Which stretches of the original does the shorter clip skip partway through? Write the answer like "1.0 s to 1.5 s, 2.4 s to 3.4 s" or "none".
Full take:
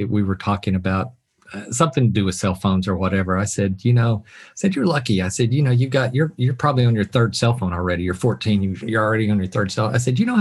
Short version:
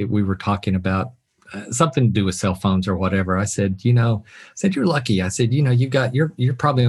none